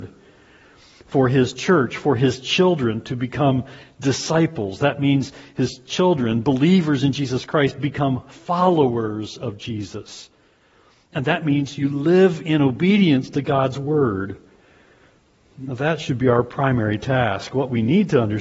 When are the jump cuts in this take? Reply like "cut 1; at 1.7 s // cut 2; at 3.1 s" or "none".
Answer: none